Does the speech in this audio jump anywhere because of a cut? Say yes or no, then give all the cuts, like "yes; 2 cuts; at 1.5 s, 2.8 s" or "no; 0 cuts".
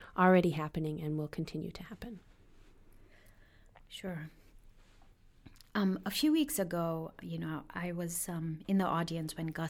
no; 0 cuts